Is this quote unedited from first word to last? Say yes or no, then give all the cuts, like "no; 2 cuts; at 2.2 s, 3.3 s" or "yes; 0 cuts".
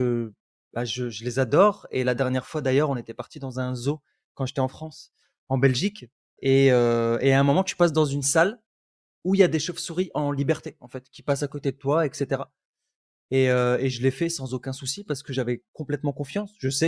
yes; 0 cuts